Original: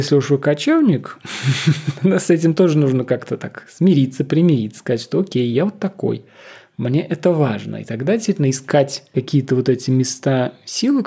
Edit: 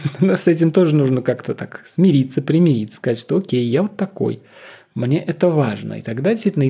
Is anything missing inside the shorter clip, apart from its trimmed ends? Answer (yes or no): no